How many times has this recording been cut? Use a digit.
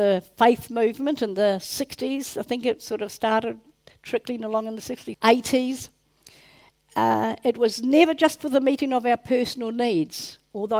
1